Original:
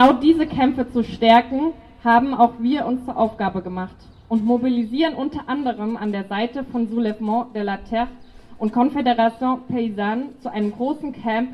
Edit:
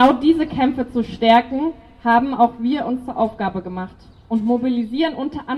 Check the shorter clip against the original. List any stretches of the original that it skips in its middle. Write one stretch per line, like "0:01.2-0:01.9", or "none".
none